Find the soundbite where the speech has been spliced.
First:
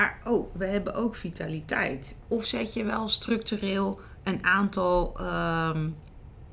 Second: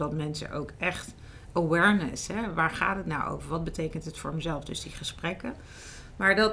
first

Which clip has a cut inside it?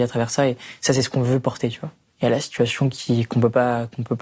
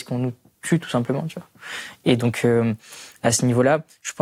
first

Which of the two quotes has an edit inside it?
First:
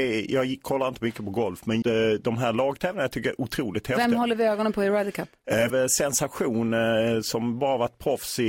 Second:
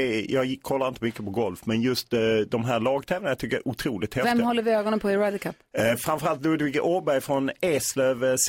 first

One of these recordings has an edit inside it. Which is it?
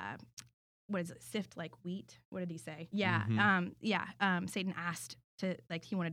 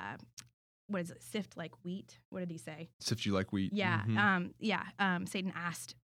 first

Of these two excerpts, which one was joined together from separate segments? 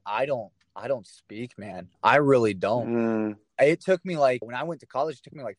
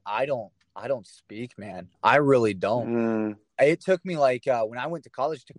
first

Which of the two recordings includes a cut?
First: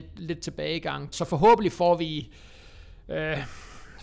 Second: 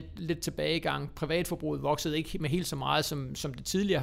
first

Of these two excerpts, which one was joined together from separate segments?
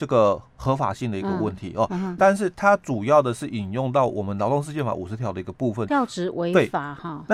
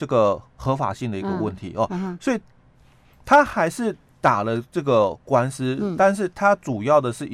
first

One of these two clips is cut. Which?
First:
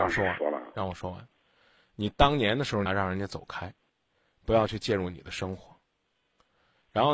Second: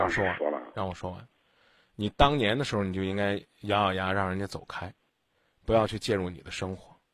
first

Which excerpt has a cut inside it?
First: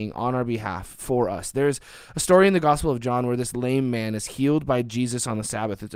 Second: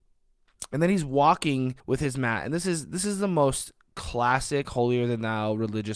second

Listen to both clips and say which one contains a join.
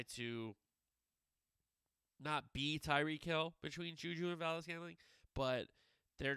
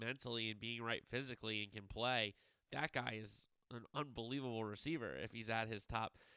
second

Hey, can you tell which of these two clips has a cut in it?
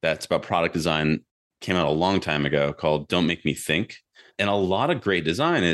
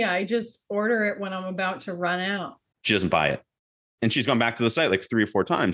second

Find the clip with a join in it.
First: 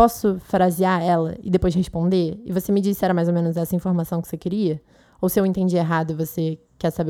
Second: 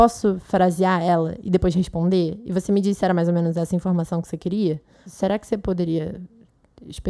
second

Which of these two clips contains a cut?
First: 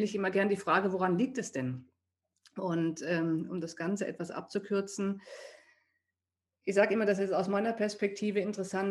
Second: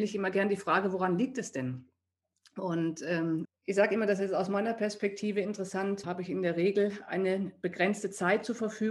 second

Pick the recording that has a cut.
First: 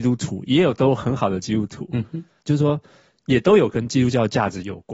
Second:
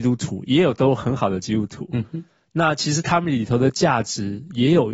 first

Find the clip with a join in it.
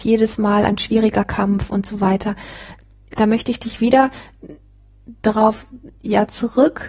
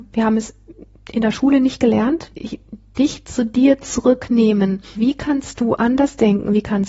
second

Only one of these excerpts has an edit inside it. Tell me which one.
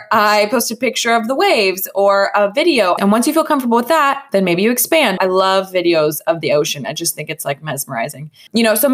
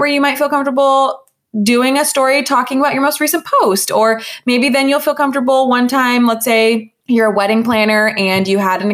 first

